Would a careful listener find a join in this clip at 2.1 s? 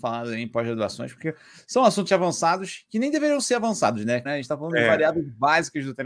yes; 2 cuts; at 2.1 s, 4.3 s

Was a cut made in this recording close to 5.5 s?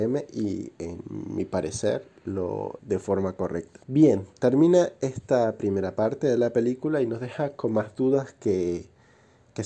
no; 2 cuts; at 2.8 s, 3.8 s

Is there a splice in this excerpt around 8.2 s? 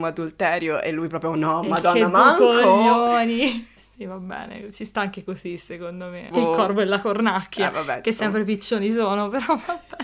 no; 2 cuts; at 3.8 s, 6.3 s

